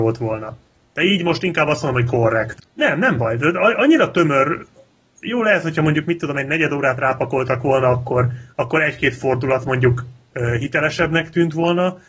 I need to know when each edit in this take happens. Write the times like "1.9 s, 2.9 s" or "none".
2.6 s